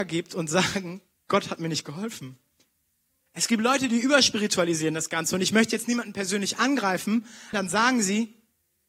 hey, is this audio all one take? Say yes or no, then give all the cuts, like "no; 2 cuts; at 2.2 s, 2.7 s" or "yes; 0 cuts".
no; 2 cuts; at 3.2 s, 7.5 s